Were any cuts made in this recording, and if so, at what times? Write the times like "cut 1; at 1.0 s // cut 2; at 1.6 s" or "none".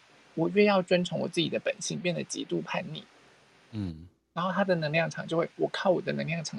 none